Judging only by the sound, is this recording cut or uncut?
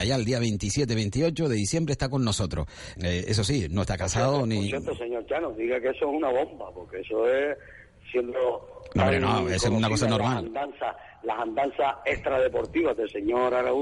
cut